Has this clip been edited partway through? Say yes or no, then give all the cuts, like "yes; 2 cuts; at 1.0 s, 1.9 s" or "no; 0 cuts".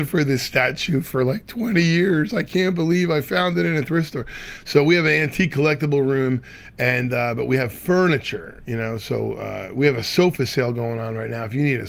no; 0 cuts